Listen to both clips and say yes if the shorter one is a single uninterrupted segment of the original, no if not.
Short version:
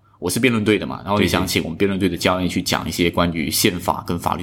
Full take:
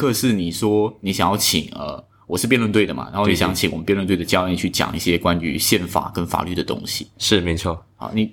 yes